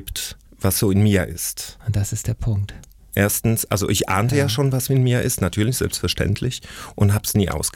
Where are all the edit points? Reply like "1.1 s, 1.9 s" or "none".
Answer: none